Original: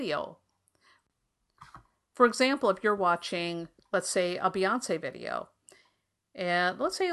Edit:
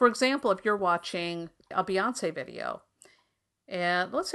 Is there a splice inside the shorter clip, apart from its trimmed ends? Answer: yes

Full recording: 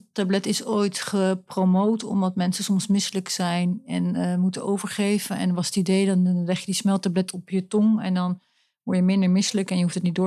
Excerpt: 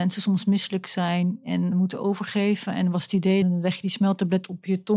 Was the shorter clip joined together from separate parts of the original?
yes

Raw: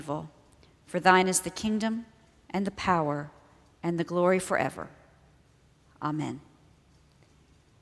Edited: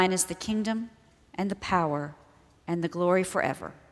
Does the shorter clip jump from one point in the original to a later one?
no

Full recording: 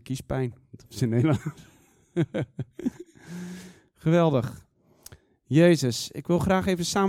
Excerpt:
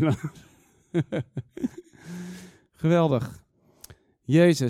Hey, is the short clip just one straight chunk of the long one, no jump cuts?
yes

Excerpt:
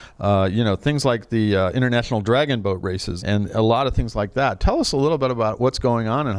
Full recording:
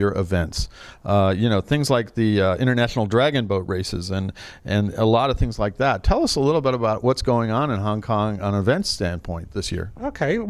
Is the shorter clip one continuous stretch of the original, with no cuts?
no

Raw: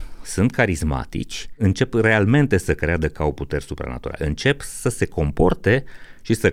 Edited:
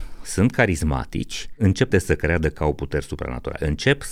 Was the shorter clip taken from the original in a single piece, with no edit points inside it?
no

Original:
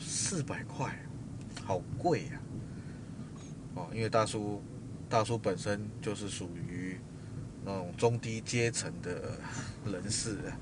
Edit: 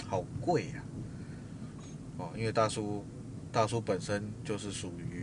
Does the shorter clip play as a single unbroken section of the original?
yes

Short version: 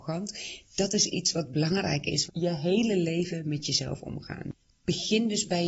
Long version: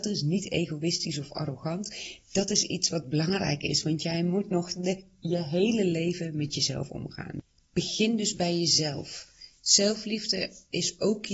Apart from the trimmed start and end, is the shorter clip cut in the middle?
yes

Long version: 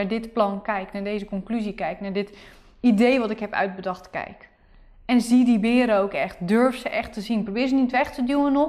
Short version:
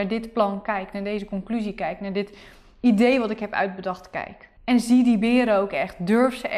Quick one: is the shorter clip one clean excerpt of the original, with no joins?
no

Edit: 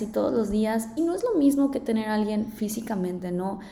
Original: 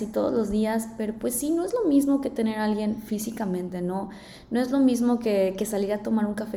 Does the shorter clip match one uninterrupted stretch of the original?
no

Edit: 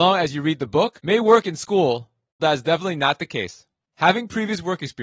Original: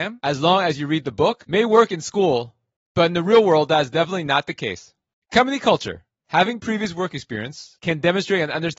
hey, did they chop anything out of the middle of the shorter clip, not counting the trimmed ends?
yes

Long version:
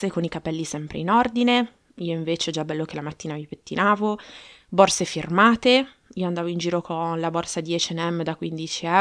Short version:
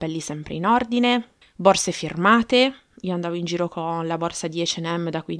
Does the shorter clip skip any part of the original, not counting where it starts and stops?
yes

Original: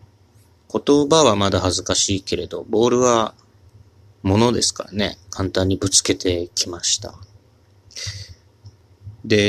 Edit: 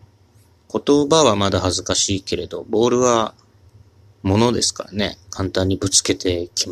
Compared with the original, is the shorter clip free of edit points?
yes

